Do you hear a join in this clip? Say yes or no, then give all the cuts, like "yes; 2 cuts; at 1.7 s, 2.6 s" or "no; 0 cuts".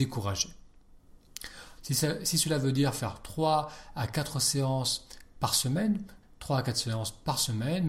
yes; 2 cuts; at 1.8 s, 6.2 s